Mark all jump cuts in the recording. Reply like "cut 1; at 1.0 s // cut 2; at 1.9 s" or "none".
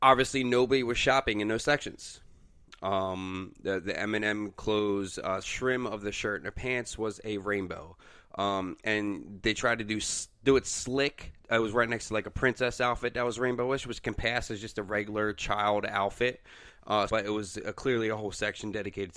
cut 1; at 5.4 s // cut 2; at 17.1 s